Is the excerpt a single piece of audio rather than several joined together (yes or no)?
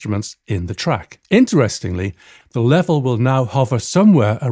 no